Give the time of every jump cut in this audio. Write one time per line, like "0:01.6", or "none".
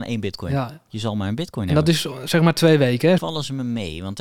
0:03.2